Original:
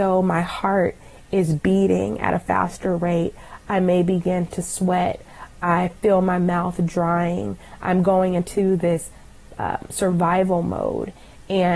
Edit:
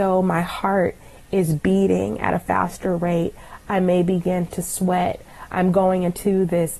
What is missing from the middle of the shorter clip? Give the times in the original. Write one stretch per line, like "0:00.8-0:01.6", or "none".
0:05.5-0:07.8